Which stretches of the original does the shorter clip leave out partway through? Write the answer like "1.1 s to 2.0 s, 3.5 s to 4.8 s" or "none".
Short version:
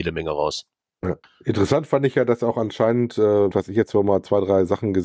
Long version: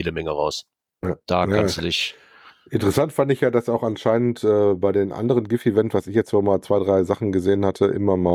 1.2 s to 2.5 s, 4.8 s to 5.9 s